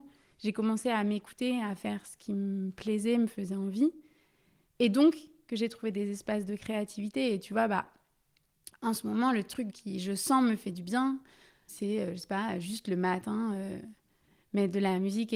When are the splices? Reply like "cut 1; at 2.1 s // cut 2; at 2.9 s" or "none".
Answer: cut 1; at 9.7 s // cut 2; at 11.7 s